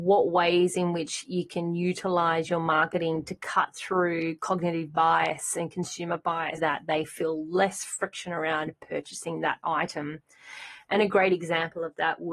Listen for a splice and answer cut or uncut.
cut